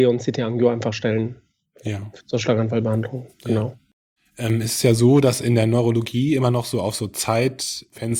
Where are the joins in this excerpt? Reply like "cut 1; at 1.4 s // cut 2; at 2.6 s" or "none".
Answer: none